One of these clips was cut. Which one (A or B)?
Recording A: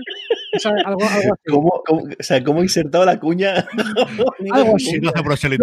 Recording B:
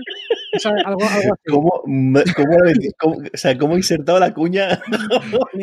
A